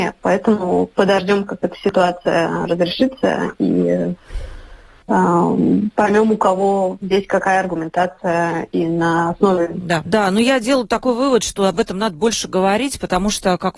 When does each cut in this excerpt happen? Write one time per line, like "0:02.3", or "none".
0:10.0